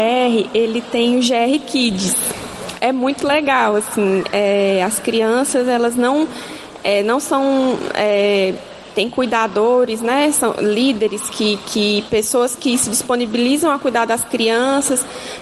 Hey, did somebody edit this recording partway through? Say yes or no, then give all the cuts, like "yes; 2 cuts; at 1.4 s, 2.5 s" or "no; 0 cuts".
no; 0 cuts